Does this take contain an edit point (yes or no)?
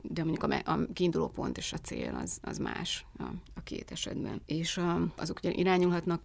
yes